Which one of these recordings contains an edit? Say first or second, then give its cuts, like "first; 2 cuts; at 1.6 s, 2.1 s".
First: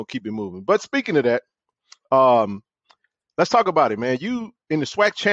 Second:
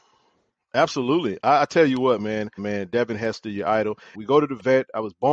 second; 2 cuts; at 2.6 s, 4.1 s